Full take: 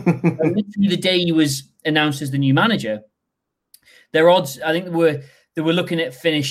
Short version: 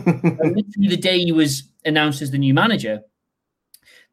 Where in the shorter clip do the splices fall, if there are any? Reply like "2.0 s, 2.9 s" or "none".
none